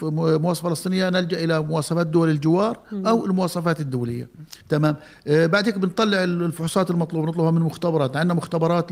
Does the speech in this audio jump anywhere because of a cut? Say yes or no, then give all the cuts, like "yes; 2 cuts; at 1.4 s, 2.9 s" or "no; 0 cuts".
yes; 1 cut; at 4.6 s